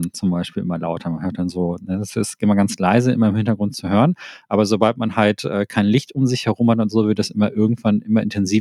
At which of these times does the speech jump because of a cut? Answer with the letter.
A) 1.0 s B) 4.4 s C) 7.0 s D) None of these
D